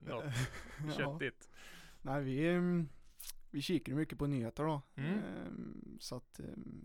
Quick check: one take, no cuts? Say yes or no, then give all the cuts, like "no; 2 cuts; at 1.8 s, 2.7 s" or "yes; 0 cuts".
yes; 0 cuts